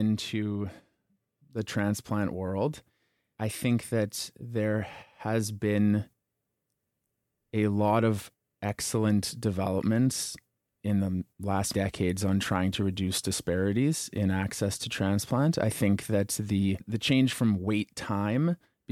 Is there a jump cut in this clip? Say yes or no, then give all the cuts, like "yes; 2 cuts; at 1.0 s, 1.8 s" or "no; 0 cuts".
no; 0 cuts